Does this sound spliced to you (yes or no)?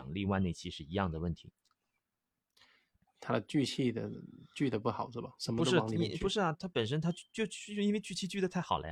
yes